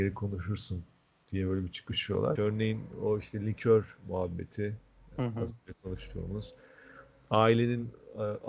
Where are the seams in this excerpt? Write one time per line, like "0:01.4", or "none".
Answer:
0:02.4